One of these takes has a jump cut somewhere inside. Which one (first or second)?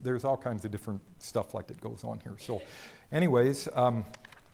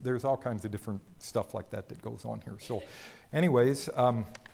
first